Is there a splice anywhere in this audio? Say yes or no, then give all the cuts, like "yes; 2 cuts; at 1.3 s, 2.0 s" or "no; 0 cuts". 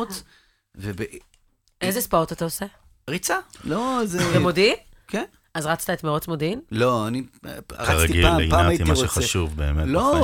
no; 0 cuts